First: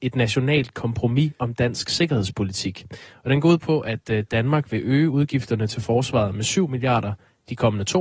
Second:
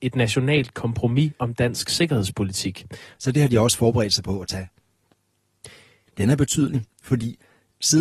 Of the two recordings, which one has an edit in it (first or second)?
second